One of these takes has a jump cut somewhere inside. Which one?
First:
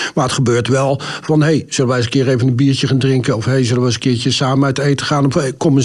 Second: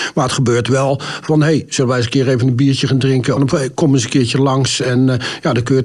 second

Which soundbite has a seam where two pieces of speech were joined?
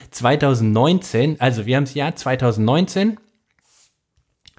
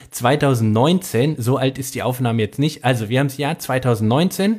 first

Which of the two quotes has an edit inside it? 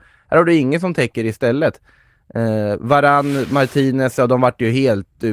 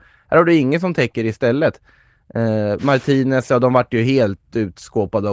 second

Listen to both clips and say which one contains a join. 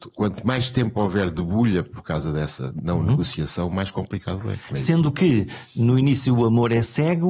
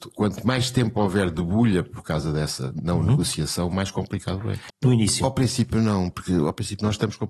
second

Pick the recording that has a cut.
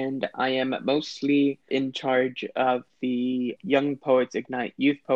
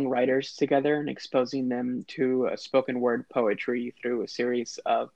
first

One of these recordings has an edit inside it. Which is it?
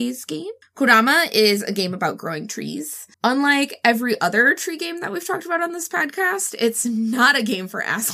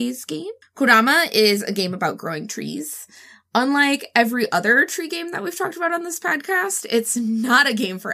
first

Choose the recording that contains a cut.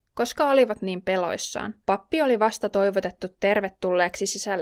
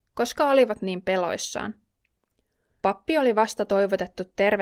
first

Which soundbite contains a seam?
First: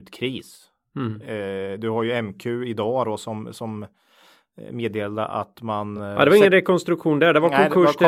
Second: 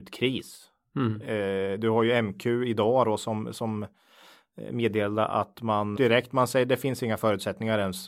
second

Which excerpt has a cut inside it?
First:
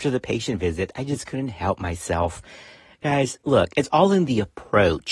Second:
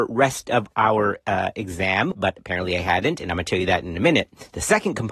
second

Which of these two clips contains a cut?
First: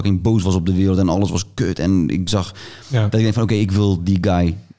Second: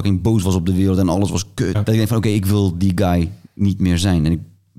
second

